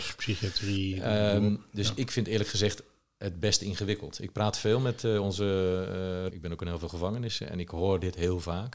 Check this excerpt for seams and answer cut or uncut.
cut